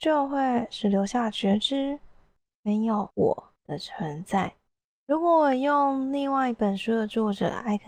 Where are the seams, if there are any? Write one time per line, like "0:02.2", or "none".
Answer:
none